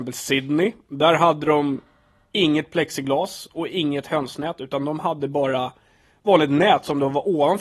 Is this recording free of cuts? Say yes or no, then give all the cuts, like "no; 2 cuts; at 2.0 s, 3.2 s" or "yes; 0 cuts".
yes; 0 cuts